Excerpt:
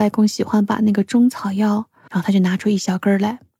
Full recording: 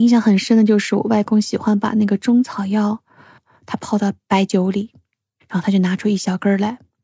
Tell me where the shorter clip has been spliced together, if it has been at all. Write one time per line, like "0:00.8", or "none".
0:02.1